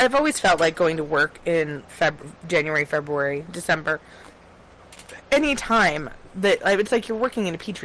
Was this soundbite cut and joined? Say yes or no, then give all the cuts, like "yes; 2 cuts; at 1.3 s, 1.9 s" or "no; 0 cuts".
yes; 1 cut; at 1.9 s